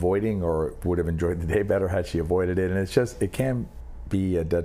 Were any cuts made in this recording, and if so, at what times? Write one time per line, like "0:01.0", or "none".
none

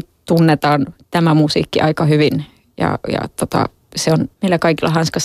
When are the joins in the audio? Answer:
0:04.3

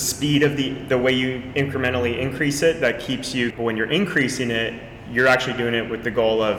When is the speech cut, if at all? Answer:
0:03.5

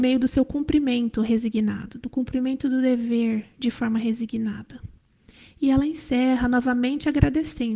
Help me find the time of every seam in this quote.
none

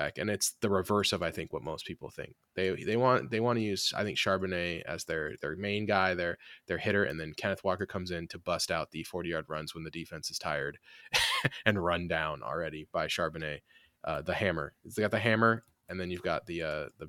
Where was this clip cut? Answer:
none

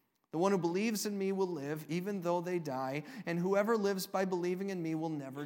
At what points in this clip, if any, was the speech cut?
none

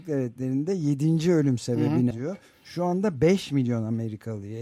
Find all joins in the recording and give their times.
0:02.1

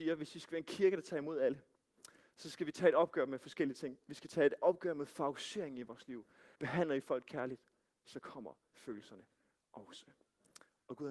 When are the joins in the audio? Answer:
0:06.6

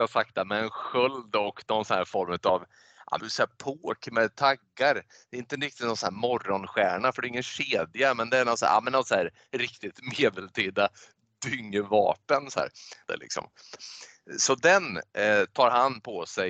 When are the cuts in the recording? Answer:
0:03.2
0:13.1

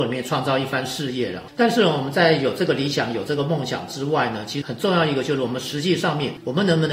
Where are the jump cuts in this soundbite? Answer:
0:04.6

